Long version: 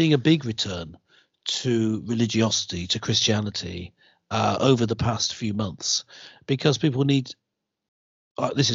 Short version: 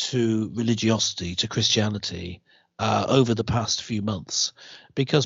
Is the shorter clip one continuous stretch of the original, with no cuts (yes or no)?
yes